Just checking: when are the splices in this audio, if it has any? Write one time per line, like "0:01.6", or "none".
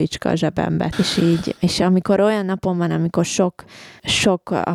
0:00.9